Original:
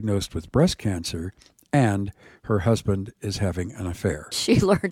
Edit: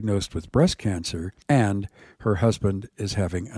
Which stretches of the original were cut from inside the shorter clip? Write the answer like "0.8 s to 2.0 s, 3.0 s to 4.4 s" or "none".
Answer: 1.4 s to 1.6 s